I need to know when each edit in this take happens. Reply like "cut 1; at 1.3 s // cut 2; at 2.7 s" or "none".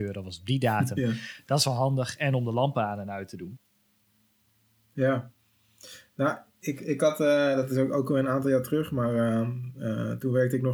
none